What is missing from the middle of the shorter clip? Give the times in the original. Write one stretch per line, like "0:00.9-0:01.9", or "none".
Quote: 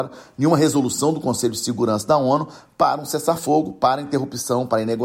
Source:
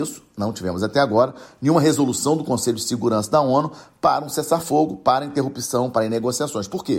none